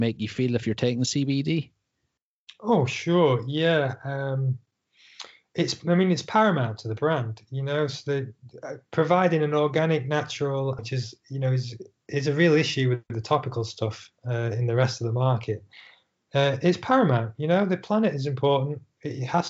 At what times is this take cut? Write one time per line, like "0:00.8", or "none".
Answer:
0:10.8

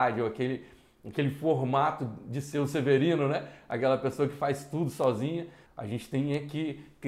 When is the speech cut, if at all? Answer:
0:05.7

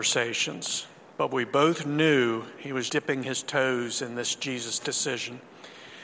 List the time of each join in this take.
0:02.9

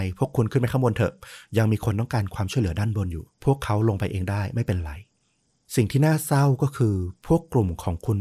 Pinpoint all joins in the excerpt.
0:03.3

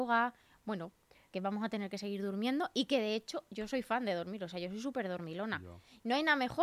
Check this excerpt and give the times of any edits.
0:01.3

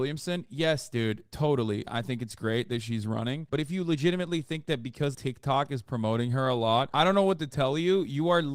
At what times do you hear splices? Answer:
0:01.9
0:05.1
0:06.9

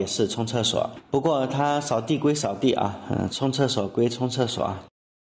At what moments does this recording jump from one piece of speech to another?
none

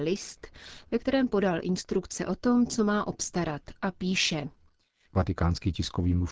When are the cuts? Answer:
0:05.1

